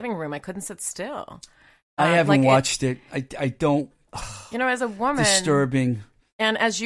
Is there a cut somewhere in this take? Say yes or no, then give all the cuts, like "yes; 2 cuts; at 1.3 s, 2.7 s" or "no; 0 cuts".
no; 0 cuts